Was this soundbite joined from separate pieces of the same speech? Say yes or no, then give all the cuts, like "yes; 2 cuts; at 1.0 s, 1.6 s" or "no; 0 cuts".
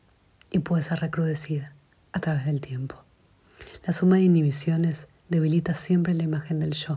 no; 0 cuts